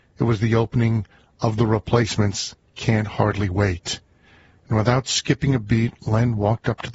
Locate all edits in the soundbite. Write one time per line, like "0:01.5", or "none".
none